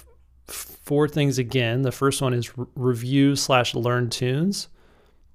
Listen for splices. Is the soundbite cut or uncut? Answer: uncut